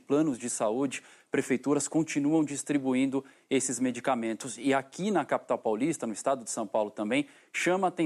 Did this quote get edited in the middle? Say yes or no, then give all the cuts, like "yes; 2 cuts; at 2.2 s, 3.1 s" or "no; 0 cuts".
no; 0 cuts